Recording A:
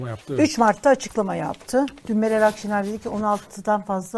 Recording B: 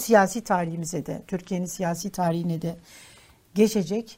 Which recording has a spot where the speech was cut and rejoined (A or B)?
A